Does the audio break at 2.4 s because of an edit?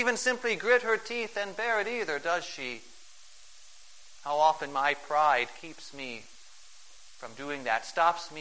no; 1 cut; at 4.1 s

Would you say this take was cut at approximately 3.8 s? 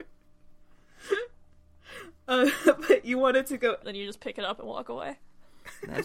yes; 1 cut; at 3.8 s

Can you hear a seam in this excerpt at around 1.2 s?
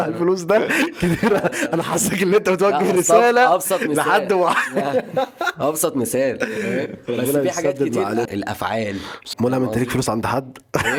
no; 2 cuts; at 8.2 s, 9.3 s

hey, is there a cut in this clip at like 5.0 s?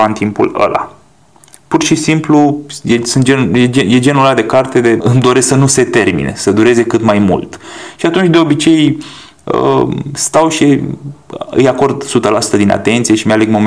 yes; 1 cut; at 5.0 s

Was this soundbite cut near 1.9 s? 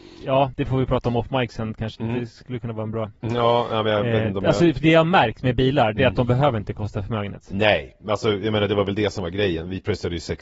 yes; 1 cut; at 1.9 s

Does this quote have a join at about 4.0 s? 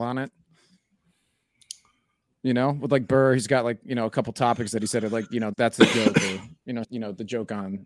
no; 2 cuts; at 5.5 s, 6.8 s

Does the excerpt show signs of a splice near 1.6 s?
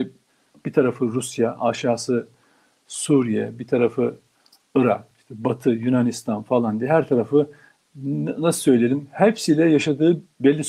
no; 1 cut; at 5.1 s

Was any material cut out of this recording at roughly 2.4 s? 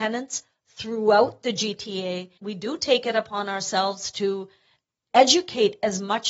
yes; 1 cut; at 2.4 s

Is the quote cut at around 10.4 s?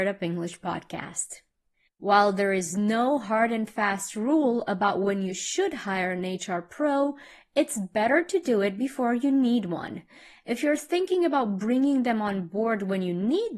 no; 1 cut; at 1.9 s

